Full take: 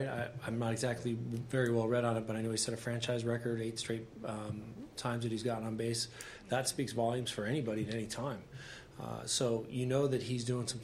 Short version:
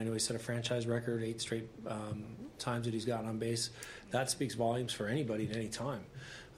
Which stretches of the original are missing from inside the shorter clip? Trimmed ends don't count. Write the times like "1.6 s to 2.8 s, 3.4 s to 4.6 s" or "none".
none